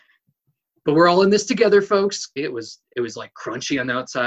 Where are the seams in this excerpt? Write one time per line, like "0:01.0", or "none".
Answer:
0:02.4